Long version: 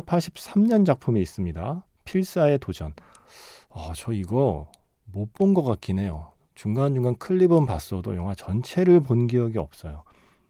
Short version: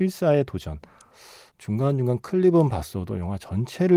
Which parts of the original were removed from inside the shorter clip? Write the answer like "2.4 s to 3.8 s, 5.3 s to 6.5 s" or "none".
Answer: 3.7 s to 6.5 s